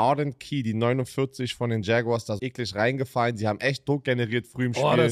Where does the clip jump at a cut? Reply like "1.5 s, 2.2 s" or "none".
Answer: 2.4 s